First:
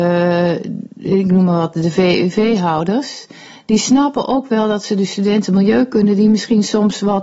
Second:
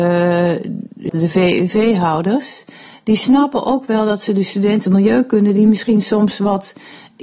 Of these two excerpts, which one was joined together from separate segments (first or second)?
second